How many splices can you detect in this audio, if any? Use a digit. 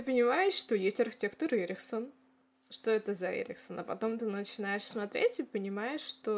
0